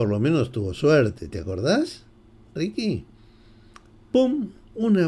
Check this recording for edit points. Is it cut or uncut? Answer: uncut